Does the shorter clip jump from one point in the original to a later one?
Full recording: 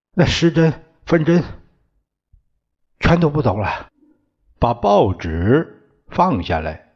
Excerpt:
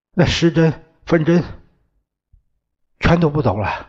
no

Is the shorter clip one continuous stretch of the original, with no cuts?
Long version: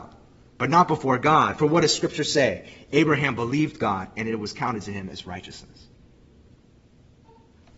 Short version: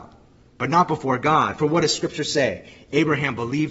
yes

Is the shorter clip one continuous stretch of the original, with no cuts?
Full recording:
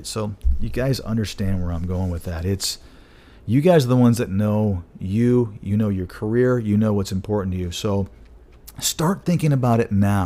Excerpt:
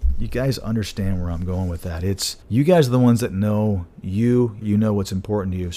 no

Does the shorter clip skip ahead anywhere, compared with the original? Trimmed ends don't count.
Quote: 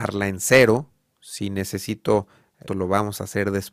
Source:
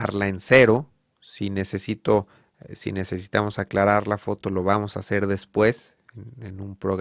yes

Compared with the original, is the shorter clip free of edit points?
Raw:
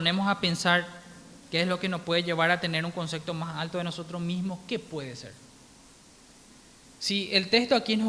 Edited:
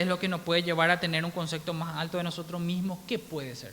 yes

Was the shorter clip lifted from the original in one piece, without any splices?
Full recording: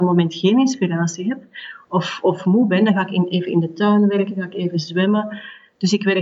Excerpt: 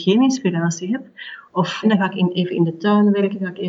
no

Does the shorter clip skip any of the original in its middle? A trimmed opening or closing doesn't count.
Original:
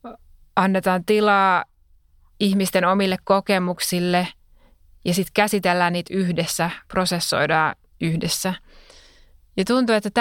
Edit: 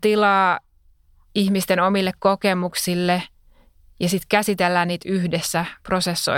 no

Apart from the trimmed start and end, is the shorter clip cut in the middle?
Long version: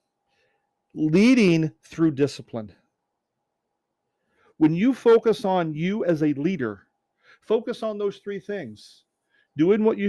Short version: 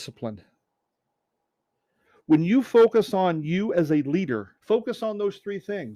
yes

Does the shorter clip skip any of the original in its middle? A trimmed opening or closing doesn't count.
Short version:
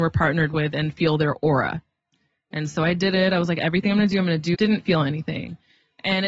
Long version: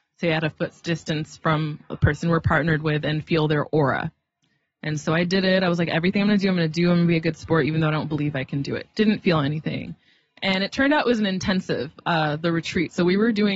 yes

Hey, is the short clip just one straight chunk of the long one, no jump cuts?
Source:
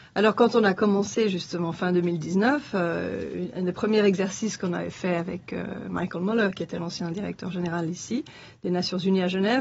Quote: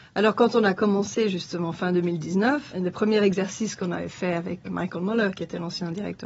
no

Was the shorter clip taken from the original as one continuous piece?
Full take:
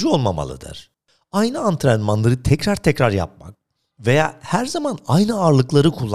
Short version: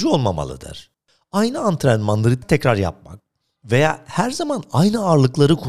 no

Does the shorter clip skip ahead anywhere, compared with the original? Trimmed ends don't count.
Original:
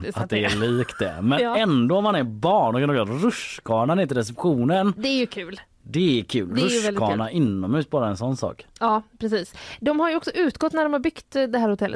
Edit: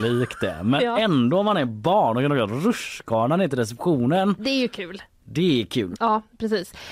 yes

